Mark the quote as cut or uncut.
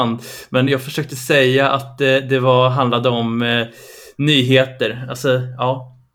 uncut